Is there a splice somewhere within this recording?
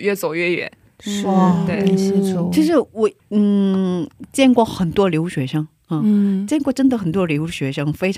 yes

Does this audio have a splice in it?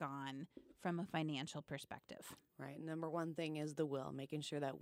no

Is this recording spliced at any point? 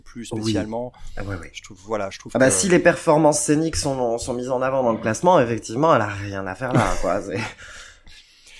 no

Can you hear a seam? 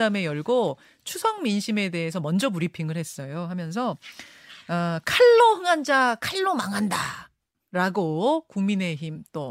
no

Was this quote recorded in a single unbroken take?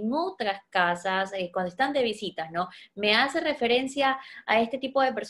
yes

